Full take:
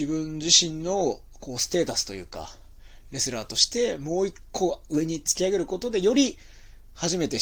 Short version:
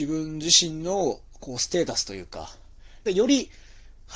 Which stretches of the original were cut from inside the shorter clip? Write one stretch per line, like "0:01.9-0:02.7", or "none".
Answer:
0:03.1-0:05.9